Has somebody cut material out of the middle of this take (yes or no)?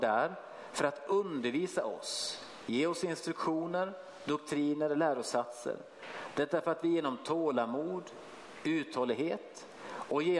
no